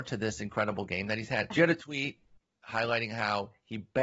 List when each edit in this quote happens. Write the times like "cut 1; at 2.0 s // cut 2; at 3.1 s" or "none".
cut 1; at 1.5 s